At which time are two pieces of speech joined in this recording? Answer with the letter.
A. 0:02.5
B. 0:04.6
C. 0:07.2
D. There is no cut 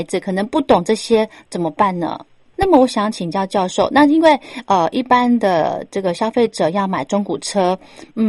A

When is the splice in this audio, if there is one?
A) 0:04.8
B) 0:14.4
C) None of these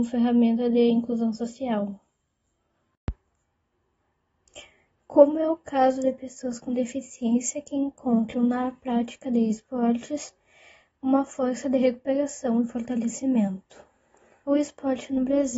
C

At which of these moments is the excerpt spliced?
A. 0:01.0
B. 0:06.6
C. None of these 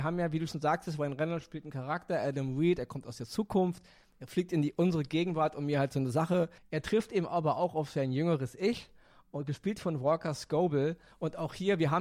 B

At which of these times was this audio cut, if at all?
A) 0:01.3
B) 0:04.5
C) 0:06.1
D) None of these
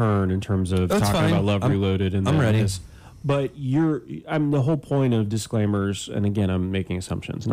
D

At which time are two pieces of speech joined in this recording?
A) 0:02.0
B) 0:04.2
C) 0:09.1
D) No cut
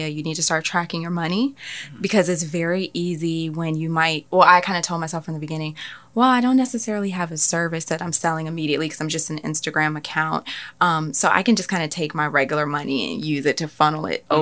B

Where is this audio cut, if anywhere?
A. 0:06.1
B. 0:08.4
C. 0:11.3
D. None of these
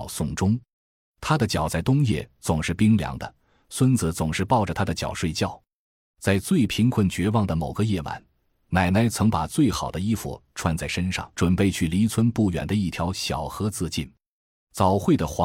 C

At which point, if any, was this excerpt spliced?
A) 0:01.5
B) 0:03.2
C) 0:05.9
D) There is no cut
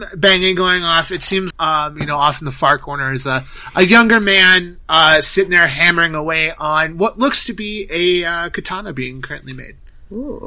A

